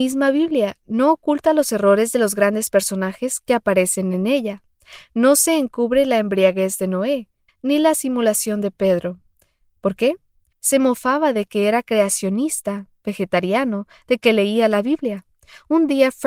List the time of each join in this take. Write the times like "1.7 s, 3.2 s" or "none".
7.5 s, 10.5 s